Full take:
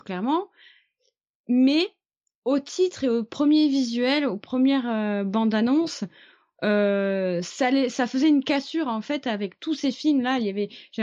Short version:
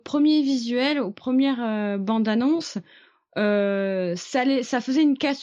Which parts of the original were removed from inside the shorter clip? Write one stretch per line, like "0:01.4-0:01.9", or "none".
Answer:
none